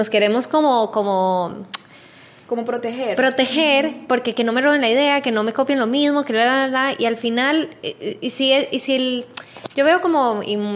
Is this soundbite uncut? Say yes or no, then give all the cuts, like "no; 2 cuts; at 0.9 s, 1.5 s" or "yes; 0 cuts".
yes; 0 cuts